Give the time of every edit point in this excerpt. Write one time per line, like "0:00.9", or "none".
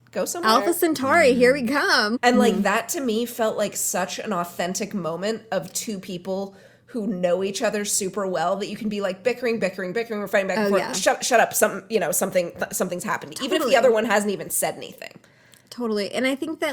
0:02.1